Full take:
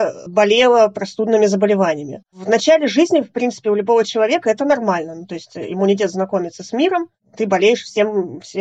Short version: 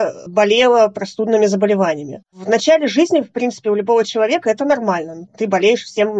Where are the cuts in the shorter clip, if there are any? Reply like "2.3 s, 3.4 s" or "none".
5.3 s